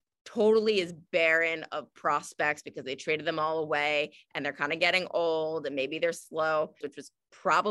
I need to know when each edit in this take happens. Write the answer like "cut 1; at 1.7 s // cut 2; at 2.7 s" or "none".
cut 1; at 6.8 s